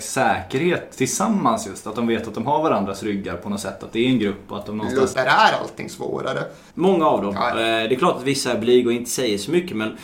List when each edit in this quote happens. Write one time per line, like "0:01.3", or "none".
0:05.1
0:06.7